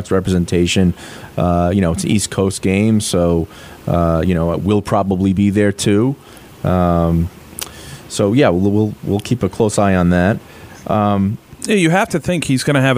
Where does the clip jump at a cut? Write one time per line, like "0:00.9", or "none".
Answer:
none